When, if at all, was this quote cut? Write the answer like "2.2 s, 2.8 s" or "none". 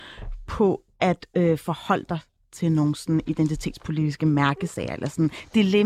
none